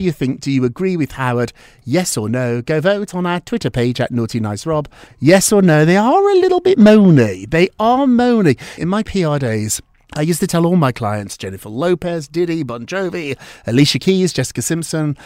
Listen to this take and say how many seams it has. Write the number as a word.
two